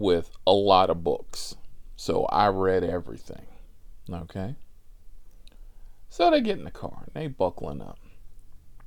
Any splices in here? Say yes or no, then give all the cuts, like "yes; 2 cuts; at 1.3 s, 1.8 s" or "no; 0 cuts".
no; 0 cuts